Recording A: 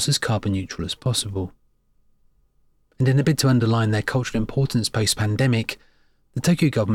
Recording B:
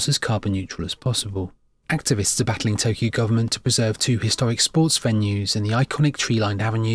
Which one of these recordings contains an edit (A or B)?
B